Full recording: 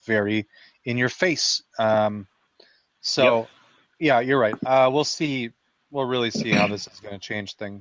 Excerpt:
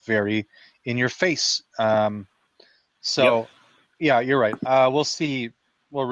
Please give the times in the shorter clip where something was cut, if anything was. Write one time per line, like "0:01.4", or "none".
none